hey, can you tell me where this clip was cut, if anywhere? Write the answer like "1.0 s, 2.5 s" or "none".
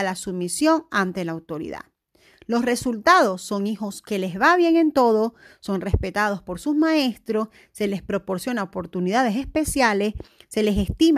none